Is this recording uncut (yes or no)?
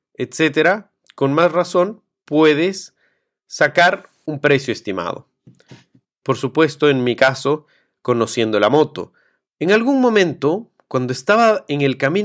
no